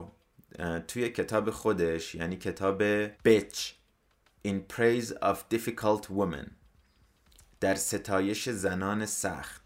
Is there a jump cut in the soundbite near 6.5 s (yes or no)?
no